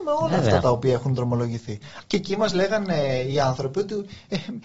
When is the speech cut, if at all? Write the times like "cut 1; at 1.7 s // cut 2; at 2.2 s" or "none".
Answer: cut 1; at 2.0 s